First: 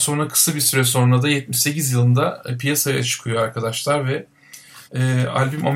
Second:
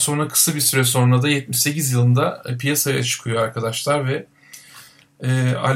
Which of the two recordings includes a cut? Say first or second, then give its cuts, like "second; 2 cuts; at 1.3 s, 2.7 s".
first; 1 cut; at 4.9 s